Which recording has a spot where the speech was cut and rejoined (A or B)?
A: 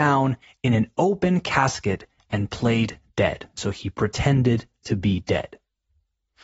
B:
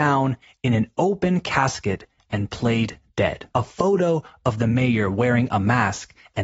B